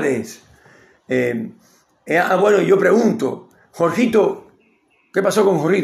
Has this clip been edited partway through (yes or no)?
no